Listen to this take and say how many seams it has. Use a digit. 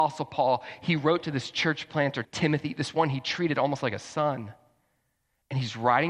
1